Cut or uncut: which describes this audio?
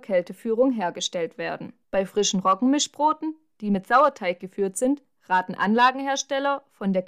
cut